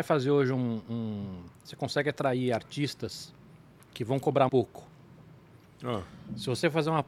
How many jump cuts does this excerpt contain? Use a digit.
2